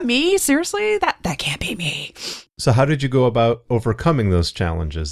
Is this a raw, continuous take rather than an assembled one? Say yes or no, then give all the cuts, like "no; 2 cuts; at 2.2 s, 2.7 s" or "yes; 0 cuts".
no; 1 cut; at 2.5 s